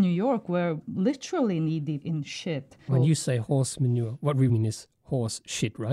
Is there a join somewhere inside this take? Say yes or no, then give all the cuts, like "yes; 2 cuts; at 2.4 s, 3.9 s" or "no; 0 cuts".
yes; 2 cuts; at 2.9 s, 4.5 s